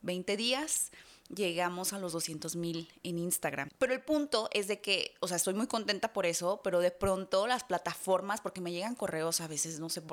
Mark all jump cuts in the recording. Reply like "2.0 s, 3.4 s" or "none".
none